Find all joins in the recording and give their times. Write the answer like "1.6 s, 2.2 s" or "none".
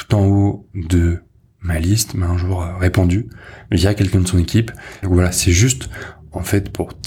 5.0 s